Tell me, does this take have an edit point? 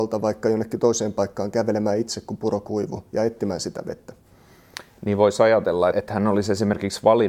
yes; 1 cut; at 5.9 s

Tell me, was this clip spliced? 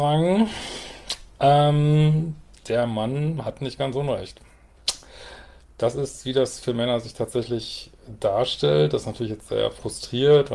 no; 0 cuts

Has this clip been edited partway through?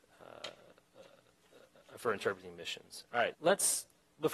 yes; 1 cut; at 3.3 s

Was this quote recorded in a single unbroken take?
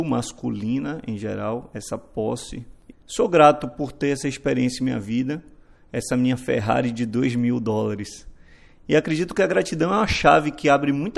no; 1 cut; at 2.9 s

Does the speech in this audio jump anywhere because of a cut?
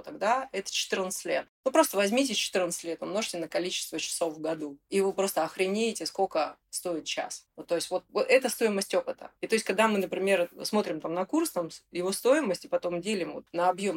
no; 0 cuts

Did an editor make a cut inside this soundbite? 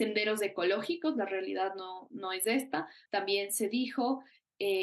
yes; 1 cut; at 3.1 s

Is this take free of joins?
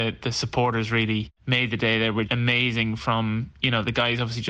no; 1 cut; at 2.3 s

